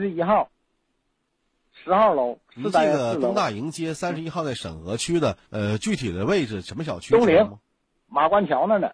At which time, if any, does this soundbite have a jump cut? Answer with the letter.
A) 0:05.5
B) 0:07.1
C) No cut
A